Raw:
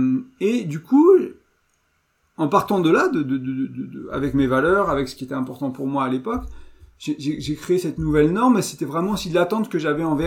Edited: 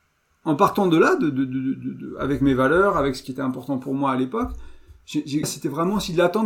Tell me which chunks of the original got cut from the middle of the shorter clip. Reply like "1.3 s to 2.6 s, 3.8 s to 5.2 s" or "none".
7.4 s to 8.6 s

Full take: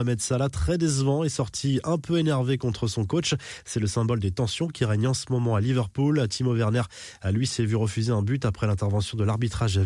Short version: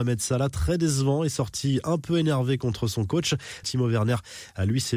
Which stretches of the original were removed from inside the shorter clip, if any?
3.6 s to 6.3 s

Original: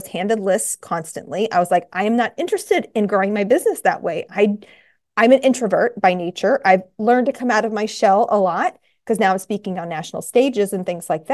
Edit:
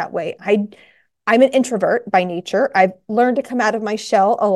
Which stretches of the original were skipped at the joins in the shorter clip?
none

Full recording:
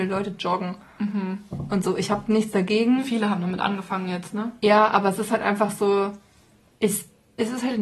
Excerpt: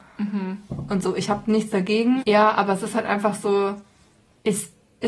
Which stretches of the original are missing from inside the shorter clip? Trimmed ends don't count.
3.0 s to 4.6 s

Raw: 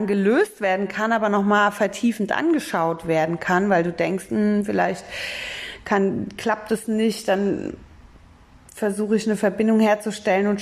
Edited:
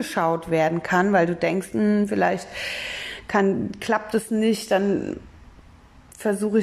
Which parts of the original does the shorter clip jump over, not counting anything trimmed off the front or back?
none

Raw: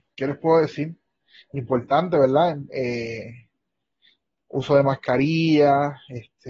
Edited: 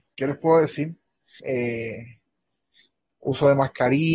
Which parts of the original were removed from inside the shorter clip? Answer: 1.4 s to 2.7 s

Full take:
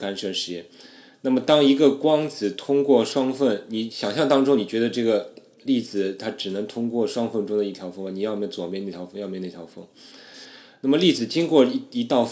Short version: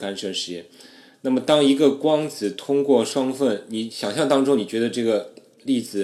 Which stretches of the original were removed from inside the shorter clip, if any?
none

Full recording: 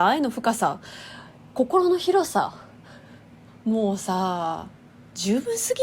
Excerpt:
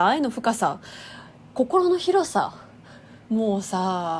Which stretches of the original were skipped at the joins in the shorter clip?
3.2 s to 3.6 s

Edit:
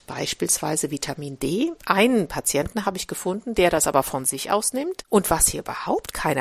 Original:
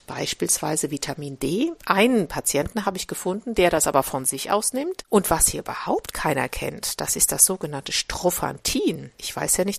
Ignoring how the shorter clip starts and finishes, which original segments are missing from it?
none

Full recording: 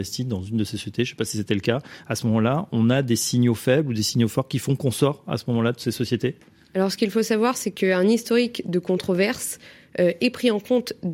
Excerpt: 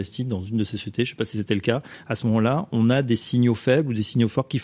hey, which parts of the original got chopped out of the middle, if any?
none

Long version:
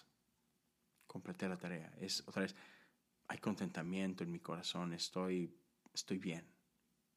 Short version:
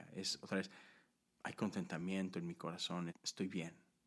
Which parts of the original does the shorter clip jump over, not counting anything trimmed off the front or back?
4.9 s to 5.8 s

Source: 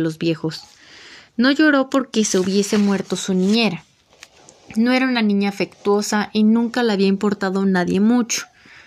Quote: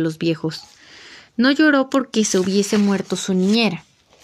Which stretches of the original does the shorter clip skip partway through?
none

